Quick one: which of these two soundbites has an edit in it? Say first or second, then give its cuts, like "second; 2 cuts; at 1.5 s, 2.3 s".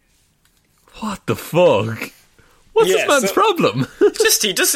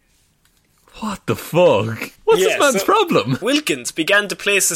second; 2 cuts; at 2.2 s, 3.4 s